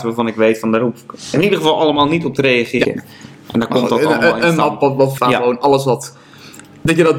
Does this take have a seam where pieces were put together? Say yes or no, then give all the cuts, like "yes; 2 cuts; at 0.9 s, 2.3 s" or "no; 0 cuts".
yes; 2 cuts; at 2.8 s, 5.2 s